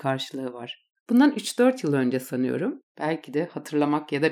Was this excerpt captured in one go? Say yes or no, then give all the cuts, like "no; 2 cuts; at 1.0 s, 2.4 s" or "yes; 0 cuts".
no; 1 cut; at 2.9 s